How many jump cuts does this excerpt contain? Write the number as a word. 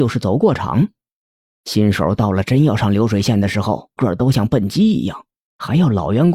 one